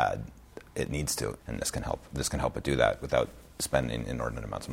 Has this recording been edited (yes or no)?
yes